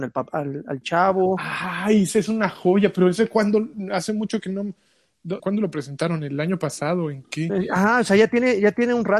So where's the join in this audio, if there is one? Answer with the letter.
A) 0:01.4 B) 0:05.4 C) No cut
B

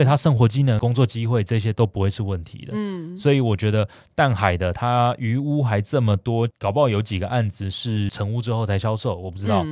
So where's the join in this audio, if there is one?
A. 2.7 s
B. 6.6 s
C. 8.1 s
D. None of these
D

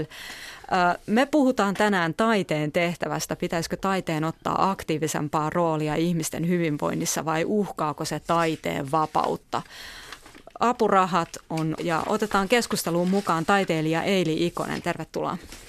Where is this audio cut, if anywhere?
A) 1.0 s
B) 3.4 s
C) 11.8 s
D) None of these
C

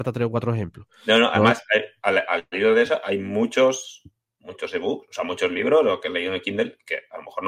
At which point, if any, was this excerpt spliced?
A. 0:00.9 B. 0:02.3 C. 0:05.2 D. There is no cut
D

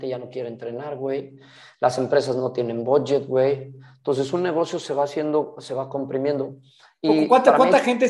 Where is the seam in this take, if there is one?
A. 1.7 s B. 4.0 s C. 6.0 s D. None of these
D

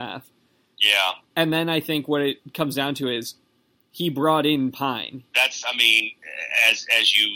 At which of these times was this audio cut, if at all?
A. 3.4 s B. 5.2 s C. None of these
B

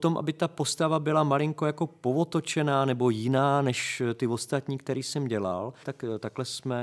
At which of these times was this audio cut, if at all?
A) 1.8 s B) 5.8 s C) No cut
B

